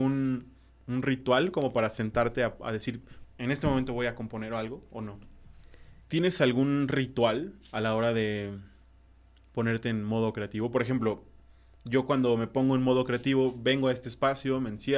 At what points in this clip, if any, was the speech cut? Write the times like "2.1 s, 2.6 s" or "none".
3.2 s, 6.0 s